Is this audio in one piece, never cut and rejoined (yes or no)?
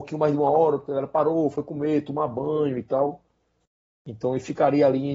yes